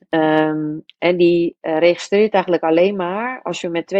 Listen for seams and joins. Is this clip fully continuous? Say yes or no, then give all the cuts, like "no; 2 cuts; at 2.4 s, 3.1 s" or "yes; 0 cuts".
yes; 0 cuts